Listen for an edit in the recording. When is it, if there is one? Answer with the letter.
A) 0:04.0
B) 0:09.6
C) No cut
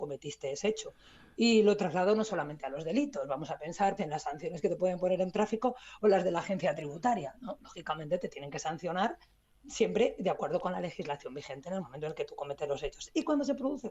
A